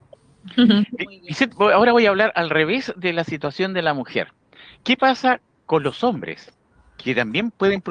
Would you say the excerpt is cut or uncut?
uncut